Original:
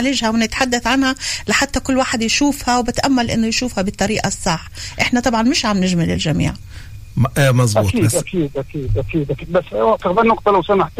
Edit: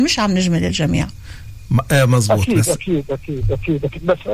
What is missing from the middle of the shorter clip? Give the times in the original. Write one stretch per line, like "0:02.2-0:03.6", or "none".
none